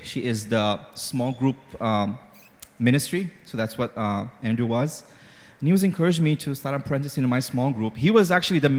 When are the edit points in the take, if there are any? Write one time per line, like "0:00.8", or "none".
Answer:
none